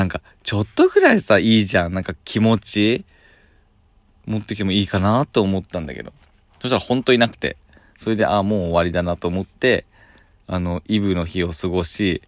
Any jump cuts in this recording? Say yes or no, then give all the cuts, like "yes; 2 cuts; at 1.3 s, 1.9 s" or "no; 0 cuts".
no; 0 cuts